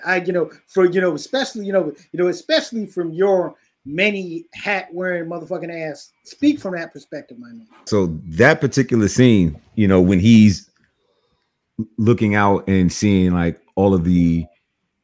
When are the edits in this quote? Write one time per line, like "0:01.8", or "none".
0:07.9

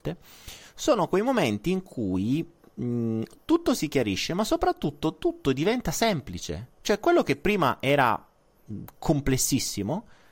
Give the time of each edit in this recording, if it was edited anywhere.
none

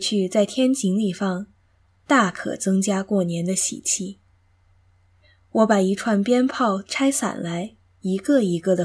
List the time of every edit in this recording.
none

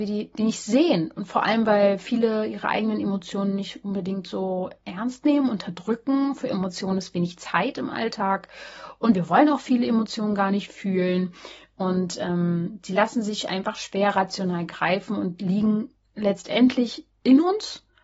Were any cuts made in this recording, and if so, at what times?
none

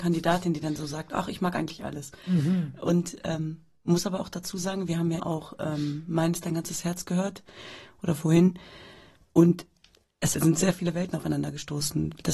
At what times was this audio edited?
0:05.2

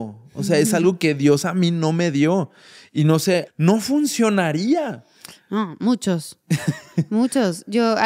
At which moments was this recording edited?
0:03.5

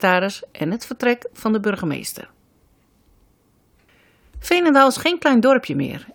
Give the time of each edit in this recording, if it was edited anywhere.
none

